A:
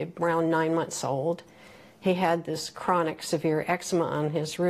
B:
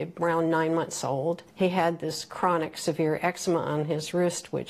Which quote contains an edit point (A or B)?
B